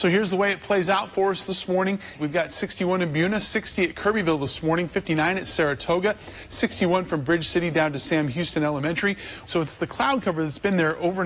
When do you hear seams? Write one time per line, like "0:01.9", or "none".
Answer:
0:02.2
0:09.5